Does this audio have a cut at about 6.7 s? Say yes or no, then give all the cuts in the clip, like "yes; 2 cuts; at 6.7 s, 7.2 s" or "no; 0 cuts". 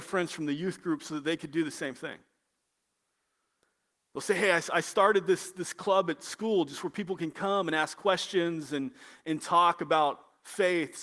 no; 1 cut; at 4.1 s